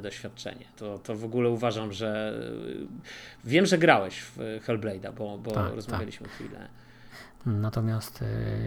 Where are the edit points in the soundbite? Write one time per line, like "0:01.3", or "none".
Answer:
0:07.4